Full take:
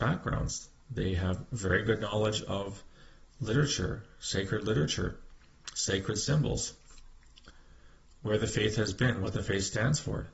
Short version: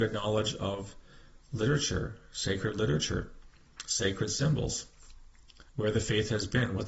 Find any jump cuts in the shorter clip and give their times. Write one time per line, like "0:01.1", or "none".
0:05.7